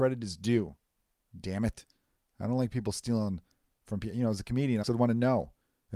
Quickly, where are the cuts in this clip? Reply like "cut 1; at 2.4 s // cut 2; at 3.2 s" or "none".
cut 1; at 4.8 s